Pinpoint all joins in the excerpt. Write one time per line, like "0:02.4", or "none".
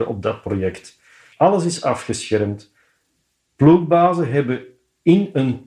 0:01.3